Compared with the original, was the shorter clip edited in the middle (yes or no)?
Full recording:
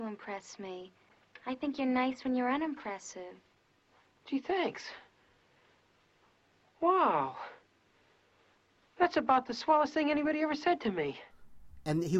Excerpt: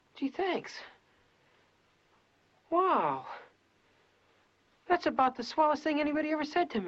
no